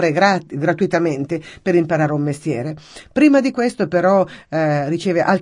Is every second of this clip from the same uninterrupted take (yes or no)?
yes